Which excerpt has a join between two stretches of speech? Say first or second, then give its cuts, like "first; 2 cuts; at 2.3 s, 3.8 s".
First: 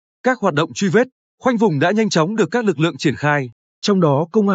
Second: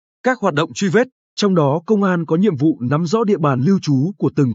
second; 1 cut; at 1.2 s